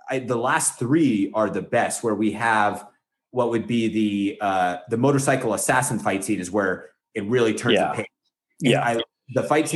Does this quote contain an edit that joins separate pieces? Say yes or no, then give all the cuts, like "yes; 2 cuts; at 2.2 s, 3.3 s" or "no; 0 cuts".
no; 0 cuts